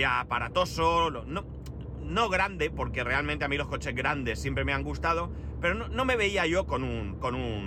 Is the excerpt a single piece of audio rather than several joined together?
yes; 0 cuts

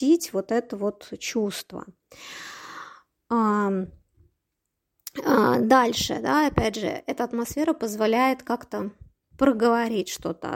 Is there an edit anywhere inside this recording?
no; 0 cuts

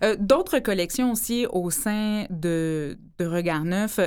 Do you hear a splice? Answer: no; 0 cuts

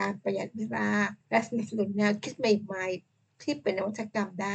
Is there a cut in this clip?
yes; 1 cut; at 1.2 s

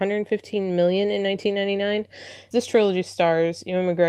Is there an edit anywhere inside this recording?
yes; 1 cut; at 2.5 s

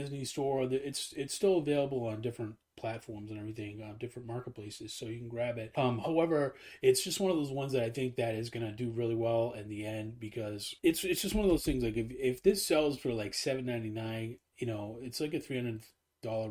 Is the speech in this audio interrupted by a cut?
no; 0 cuts

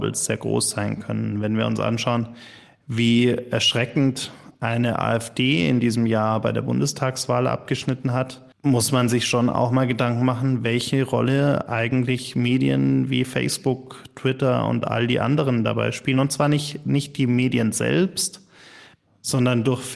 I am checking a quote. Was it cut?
yes; 1 cut; at 8.5 s

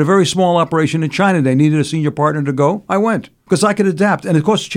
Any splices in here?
no; 0 cuts

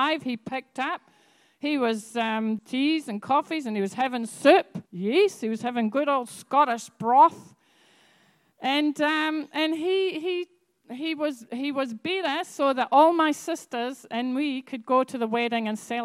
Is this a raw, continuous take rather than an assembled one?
no; 2 cuts; at 2.6 s, 4.9 s

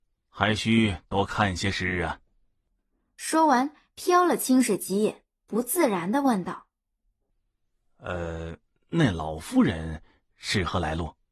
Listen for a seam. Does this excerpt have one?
no; 0 cuts

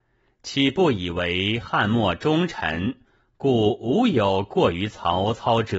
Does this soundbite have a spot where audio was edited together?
no; 0 cuts

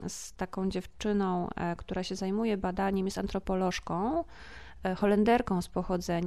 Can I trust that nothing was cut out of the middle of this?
yes; 0 cuts

